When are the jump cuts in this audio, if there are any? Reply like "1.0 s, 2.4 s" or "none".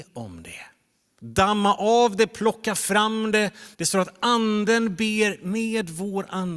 1.2 s, 3.7 s